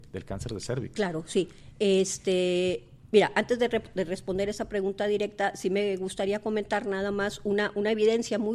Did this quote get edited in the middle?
no; 0 cuts

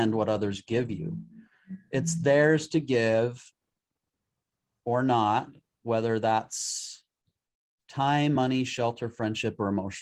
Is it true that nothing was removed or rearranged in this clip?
yes; 0 cuts

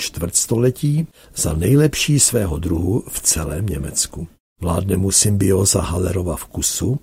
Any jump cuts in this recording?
no; 0 cuts

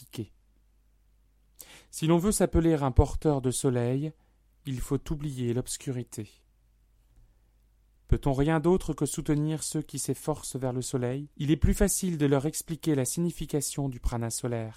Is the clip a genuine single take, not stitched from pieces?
no; 1 cut; at 11.3 s

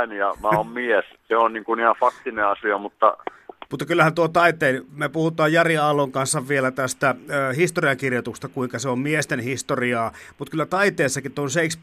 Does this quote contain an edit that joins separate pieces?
yes; 1 cut; at 3.7 s

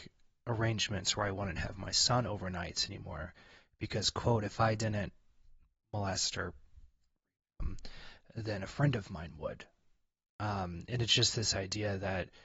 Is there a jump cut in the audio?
no; 0 cuts

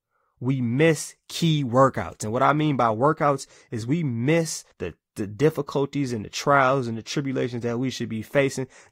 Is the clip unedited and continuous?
no; 1 cut; at 4.7 s

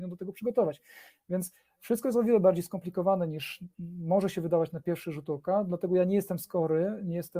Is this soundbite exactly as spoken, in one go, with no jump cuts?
yes; 0 cuts

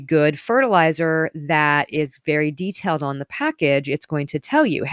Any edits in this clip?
no; 0 cuts

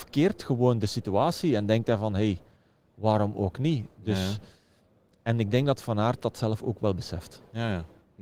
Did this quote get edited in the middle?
no; 0 cuts

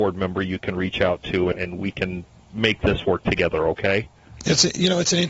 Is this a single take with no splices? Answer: no; 1 cut; at 1.5 s

